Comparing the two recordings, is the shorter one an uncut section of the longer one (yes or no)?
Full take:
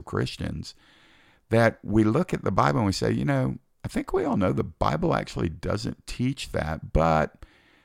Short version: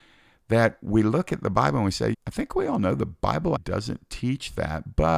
no